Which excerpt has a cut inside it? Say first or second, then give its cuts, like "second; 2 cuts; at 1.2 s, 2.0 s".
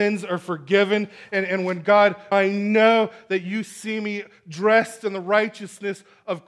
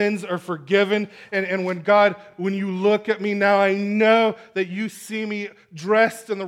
first; 1 cut; at 2.3 s